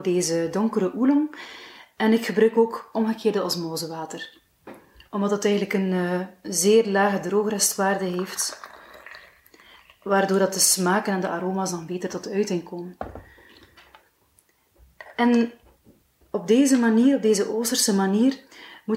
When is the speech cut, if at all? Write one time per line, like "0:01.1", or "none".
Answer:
none